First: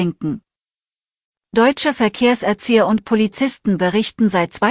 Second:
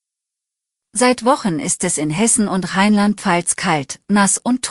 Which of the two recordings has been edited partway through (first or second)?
first